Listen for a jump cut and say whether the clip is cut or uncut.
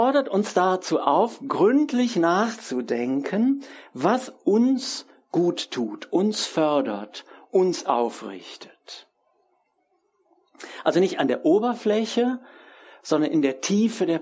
uncut